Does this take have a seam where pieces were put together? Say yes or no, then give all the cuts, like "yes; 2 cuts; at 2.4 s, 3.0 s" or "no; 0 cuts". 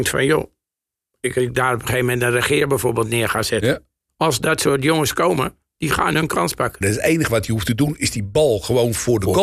yes; 2 cuts; at 4.1 s, 6.8 s